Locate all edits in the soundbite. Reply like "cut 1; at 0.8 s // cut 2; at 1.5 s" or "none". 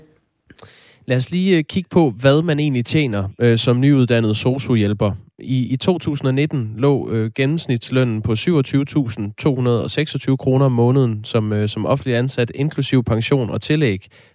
none

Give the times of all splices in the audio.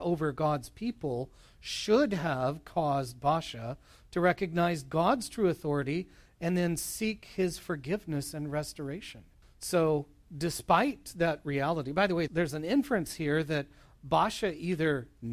cut 1; at 9.4 s // cut 2; at 12.3 s

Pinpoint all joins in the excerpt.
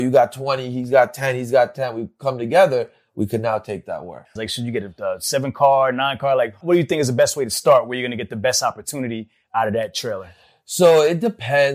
cut 1; at 4.4 s // cut 2; at 6.6 s

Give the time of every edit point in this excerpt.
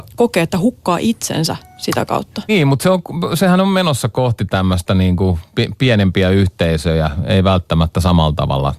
cut 1; at 2.5 s

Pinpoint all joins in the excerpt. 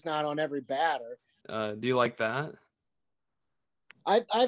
cut 1; at 1.4 s

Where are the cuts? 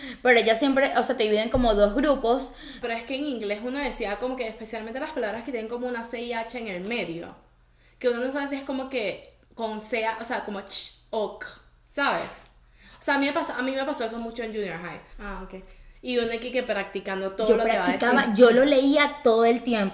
cut 1; at 2.8 s // cut 2; at 9.4 s // cut 3; at 15.1 s

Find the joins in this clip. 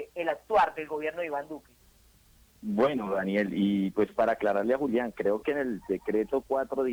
none

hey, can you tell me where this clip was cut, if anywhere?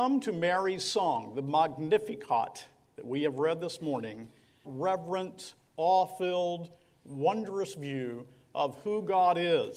cut 1; at 4.6 s

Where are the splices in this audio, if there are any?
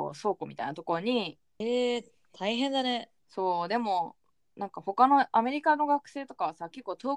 cut 1; at 1.6 s // cut 2; at 3.2 s

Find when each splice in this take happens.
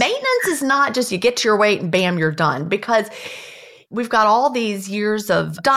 none

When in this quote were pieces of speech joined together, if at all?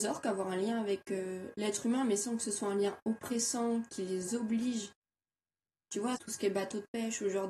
cut 1; at 6.2 s

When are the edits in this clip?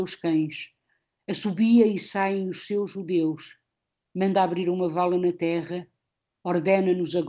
none

